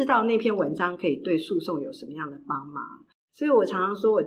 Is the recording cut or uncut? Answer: uncut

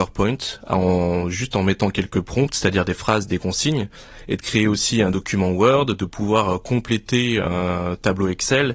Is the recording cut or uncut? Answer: uncut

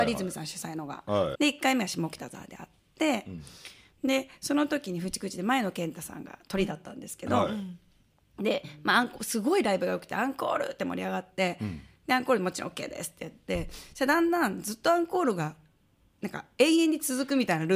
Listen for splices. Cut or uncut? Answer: cut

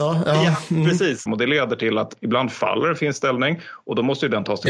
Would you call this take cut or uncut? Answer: cut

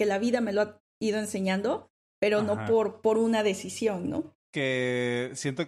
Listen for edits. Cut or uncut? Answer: cut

